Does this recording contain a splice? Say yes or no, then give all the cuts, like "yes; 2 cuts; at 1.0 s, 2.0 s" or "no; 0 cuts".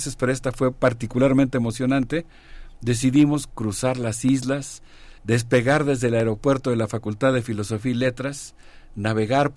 yes; 1 cut; at 5.2 s